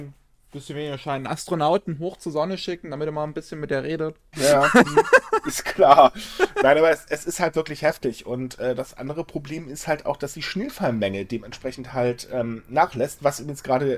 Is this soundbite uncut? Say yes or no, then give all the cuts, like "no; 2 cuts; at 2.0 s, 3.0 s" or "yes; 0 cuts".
no; 1 cut; at 4.3 s